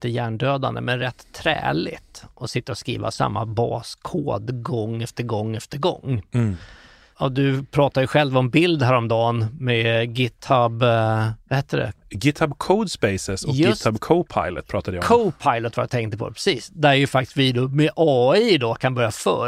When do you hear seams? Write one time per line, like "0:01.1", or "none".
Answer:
none